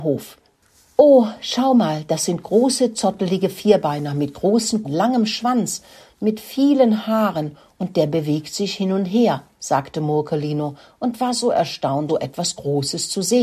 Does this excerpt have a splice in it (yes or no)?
yes